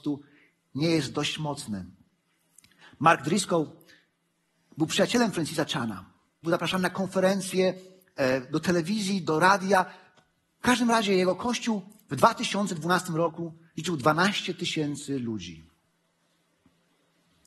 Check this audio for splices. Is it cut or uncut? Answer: cut